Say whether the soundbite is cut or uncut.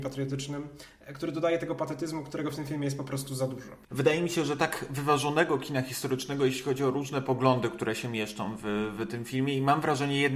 cut